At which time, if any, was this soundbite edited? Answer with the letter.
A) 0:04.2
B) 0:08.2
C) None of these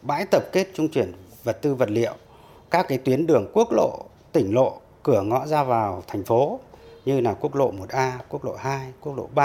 C